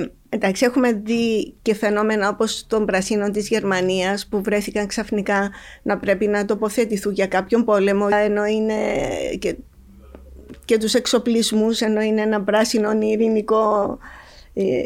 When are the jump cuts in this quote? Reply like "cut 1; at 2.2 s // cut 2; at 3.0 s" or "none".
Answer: cut 1; at 8.1 s